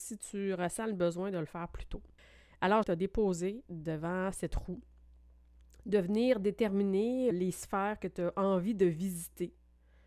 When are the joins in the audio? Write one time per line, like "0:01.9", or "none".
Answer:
0:02.8
0:07.3